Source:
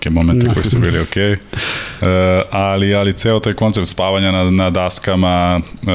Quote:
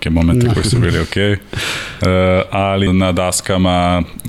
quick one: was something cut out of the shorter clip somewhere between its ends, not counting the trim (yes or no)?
yes